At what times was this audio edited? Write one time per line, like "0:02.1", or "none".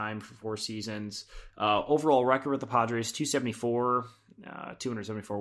none